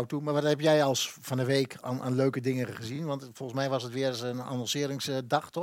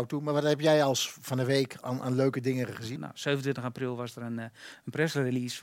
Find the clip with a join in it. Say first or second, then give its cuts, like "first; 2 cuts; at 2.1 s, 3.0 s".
second; 1 cut; at 3.0 s